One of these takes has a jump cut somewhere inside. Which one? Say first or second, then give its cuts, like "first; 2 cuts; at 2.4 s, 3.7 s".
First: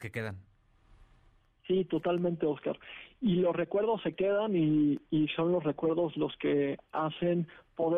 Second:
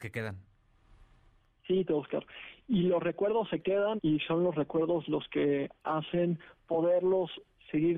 second; 2 cuts; at 1.9 s, 4.0 s